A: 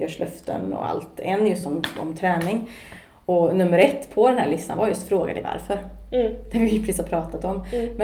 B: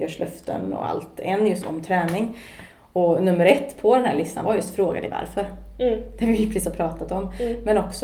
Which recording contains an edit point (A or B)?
B